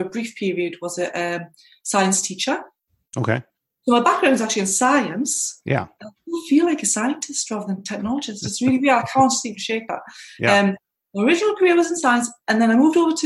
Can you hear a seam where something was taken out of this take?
no; 0 cuts

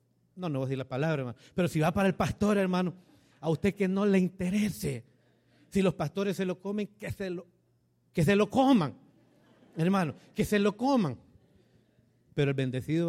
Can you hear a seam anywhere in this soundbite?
no; 0 cuts

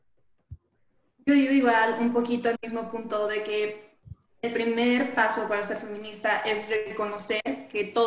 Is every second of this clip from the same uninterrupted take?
yes; 0 cuts

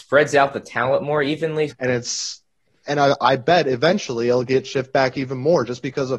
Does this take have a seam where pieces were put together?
yes; 1 cut; at 1.7 s

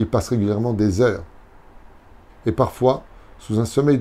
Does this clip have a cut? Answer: yes; 1 cut; at 2.3 s

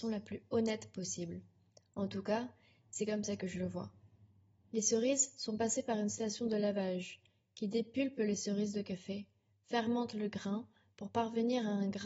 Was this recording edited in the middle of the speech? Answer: yes; 1 cut; at 4.7 s

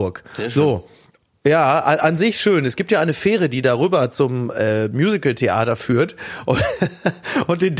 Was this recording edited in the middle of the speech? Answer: no; 0 cuts

